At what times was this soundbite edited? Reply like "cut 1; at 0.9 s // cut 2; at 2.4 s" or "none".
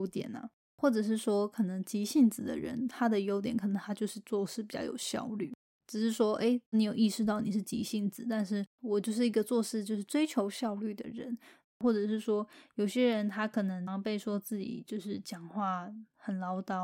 cut 1; at 11.6 s // cut 2; at 13.9 s